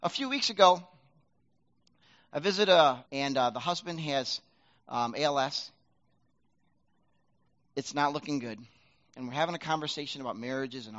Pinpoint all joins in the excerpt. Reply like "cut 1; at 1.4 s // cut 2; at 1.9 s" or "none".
cut 1; at 3.1 s